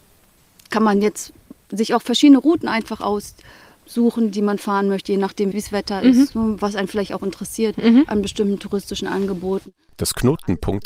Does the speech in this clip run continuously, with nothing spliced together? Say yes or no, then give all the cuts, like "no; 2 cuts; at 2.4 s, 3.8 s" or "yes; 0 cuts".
no; 1 cut; at 5.5 s